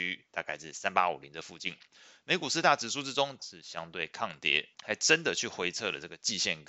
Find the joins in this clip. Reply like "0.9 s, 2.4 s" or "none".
3.4 s, 4.7 s